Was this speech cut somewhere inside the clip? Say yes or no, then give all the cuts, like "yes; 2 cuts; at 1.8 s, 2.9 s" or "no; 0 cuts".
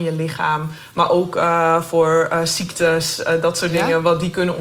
no; 0 cuts